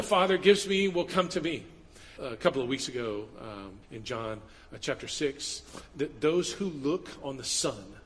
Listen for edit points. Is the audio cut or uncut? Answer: cut